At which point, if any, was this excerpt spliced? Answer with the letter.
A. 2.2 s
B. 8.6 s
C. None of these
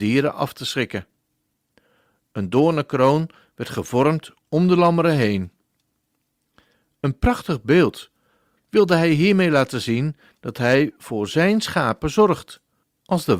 B